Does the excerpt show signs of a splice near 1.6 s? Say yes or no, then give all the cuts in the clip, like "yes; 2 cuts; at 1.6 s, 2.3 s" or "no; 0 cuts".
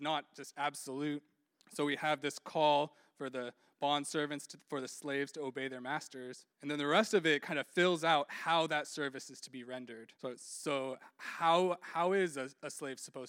yes; 3 cuts; at 1.6 s, 6.5 s, 10.2 s